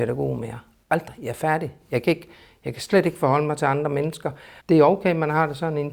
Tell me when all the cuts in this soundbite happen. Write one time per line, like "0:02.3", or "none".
0:04.6